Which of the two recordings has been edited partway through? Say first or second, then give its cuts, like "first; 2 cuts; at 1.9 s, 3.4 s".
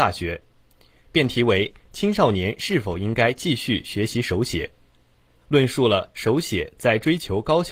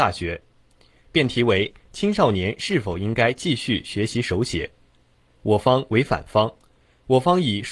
first; 1 cut; at 5.4 s